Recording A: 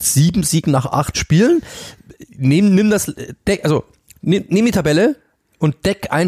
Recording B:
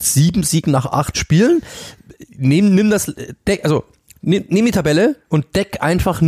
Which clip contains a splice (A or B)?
B